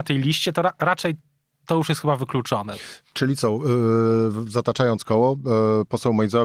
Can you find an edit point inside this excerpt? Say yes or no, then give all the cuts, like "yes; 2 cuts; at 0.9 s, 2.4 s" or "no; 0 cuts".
no; 0 cuts